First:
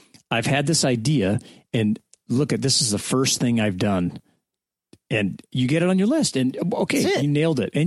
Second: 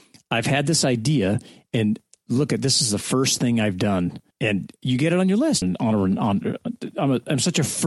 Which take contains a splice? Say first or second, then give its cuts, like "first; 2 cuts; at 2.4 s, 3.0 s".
second; 2 cuts; at 4.3 s, 5.6 s